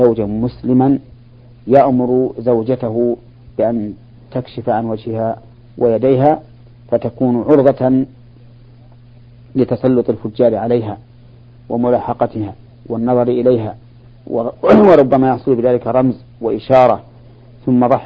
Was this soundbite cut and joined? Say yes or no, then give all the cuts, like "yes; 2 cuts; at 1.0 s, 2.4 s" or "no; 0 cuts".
no; 0 cuts